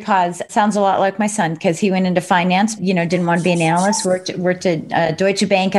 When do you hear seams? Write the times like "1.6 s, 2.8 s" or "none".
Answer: 2.8 s